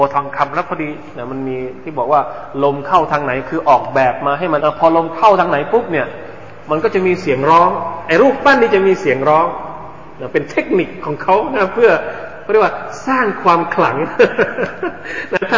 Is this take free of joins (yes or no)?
no